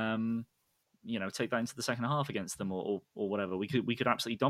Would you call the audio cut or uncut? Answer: uncut